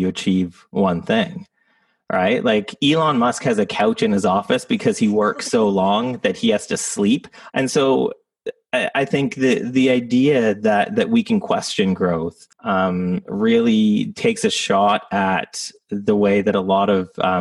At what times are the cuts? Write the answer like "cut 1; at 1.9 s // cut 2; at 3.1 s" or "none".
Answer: cut 1; at 7.5 s // cut 2; at 12.5 s